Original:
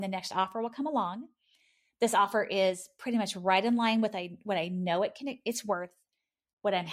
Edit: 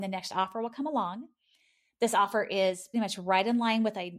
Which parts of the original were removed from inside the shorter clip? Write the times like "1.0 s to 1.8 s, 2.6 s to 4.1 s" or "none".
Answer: 2.9 s to 3.1 s